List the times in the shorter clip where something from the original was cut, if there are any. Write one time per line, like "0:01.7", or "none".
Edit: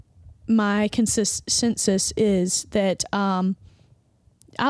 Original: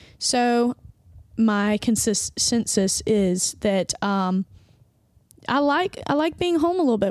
none

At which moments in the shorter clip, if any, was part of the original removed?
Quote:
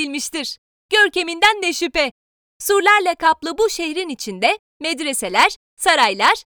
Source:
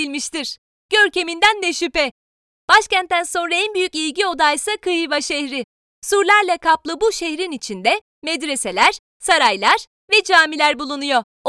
0:02.5

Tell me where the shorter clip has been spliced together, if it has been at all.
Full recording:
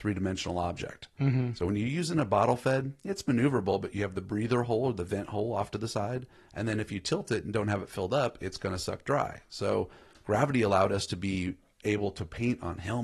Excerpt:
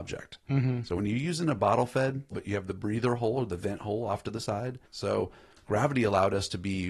0:02.3
0:04.9

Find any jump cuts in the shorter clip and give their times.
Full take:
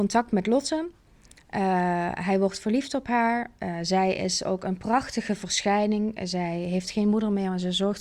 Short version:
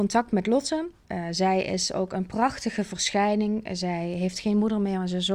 0:01.0

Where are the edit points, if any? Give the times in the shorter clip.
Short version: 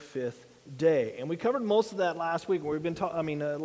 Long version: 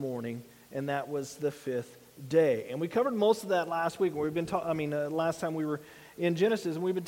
none

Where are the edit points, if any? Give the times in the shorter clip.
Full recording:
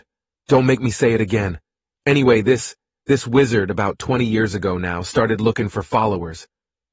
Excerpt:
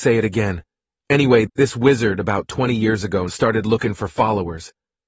0:01.5
0:03.3

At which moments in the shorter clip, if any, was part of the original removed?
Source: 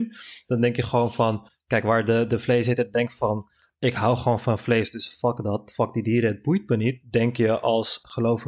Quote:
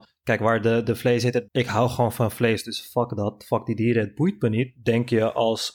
0:01.5

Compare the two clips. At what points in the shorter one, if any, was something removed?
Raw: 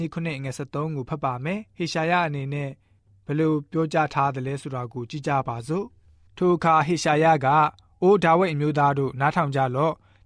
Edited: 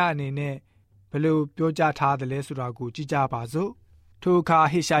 none

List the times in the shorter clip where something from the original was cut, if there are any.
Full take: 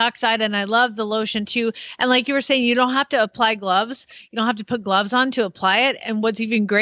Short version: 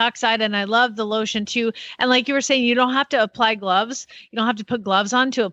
none

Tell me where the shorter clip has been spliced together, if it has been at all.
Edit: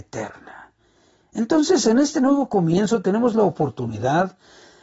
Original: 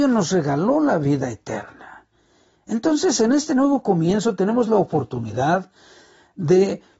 none

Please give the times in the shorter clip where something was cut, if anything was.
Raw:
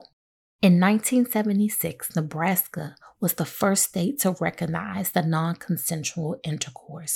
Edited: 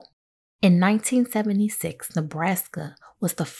none

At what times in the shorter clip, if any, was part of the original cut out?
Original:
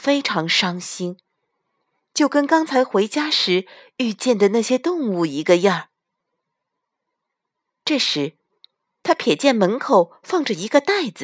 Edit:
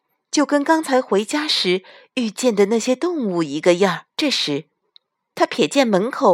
0:04.1

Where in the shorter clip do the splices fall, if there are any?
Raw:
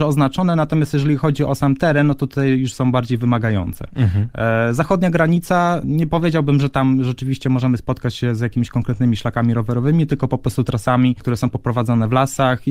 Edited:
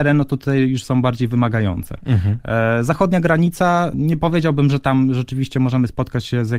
none

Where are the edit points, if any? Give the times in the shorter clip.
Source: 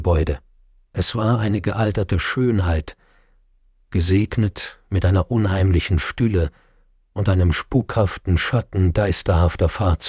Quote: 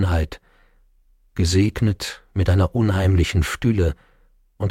none

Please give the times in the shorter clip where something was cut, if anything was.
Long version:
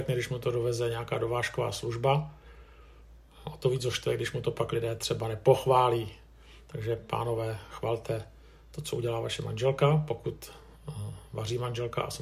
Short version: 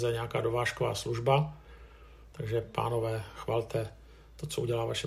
0:02.3

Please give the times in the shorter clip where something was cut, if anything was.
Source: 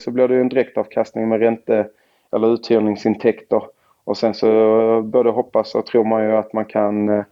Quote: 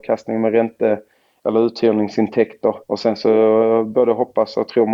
0:02.8

